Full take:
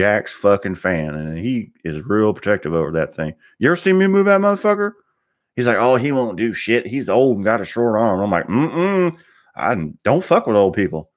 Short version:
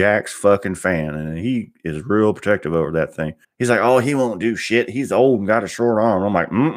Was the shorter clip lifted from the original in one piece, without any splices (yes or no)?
no